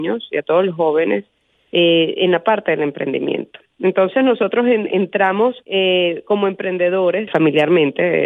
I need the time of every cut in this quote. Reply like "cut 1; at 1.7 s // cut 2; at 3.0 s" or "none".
cut 1; at 5.6 s // cut 2; at 7.3 s